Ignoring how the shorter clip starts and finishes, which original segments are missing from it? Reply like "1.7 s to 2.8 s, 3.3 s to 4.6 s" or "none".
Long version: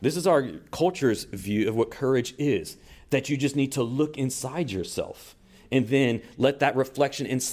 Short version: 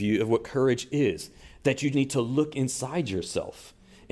3.4 s to 3.5 s